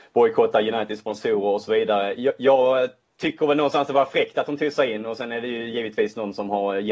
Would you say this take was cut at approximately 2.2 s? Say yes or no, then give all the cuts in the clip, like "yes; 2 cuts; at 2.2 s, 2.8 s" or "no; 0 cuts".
no; 0 cuts